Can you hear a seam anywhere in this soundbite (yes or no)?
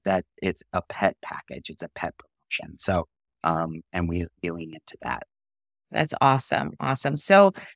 no